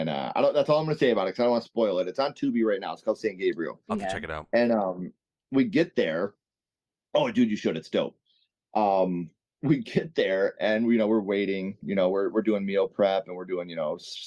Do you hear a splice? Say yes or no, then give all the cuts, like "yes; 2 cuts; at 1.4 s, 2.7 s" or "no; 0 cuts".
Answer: no; 0 cuts